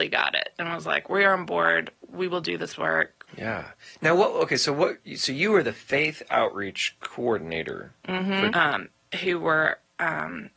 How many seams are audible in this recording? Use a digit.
2